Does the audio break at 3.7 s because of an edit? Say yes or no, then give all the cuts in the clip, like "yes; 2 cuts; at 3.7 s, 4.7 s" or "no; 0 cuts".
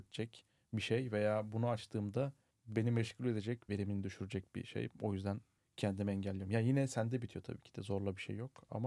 yes; 1 cut; at 3.7 s